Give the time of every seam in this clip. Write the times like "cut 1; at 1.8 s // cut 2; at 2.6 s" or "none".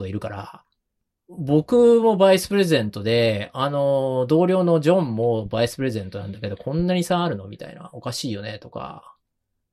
none